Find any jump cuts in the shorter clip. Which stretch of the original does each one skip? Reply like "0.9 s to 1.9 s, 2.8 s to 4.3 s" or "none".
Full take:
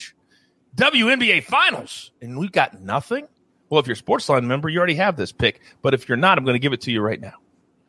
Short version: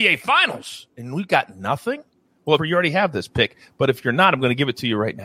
3.8 s to 4.6 s